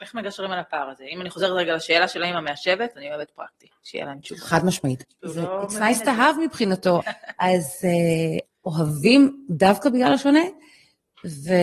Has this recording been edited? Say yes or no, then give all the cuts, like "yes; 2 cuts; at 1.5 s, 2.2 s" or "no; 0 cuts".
yes; 3 cuts; at 5.0 s, 7.0 s, 8.5 s